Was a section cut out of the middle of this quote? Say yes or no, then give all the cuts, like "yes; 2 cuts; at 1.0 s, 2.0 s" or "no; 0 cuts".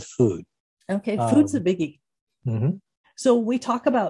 yes; 1 cut; at 3.0 s